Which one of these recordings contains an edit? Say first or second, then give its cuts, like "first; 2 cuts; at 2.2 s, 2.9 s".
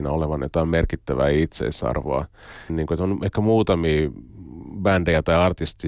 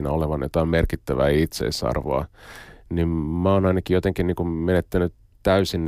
first; 1 cut; at 2.7 s